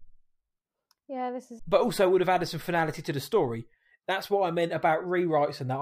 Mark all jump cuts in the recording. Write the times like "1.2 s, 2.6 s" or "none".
1.6 s